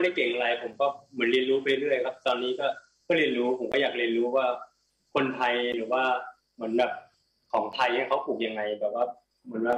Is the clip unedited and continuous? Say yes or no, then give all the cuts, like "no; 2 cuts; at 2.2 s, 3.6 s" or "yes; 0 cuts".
yes; 0 cuts